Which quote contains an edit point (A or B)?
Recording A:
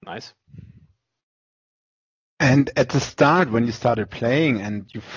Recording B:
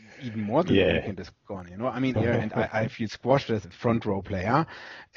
B